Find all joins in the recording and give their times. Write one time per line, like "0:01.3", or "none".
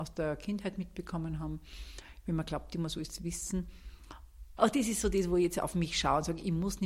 0:04.6